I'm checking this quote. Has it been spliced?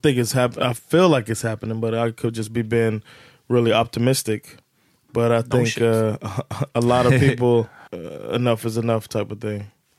yes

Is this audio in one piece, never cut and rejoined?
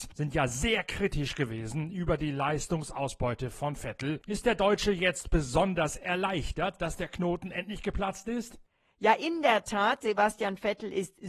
yes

